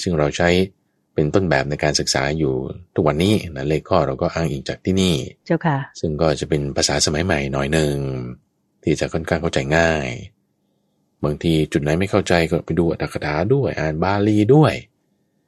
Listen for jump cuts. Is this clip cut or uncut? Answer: cut